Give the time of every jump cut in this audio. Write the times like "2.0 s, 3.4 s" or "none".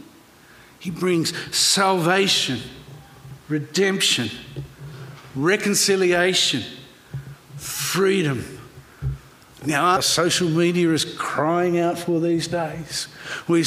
10.0 s